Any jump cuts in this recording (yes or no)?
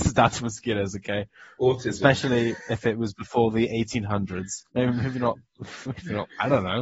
yes